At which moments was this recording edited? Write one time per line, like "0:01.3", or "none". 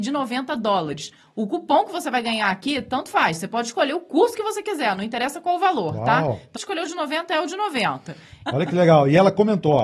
0:06.6
0:08.5